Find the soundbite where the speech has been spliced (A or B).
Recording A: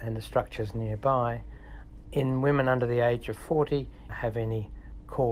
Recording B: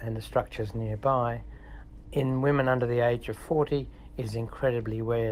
A